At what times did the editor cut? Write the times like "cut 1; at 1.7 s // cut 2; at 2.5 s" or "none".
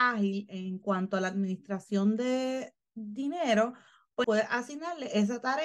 cut 1; at 4.2 s